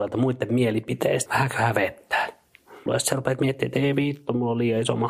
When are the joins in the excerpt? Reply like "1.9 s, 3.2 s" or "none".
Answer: 1.3 s, 2.9 s